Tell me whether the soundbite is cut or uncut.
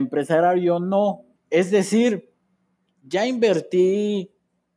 cut